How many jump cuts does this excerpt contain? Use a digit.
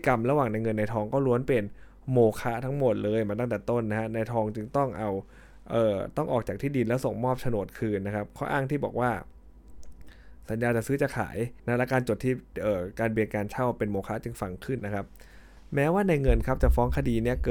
2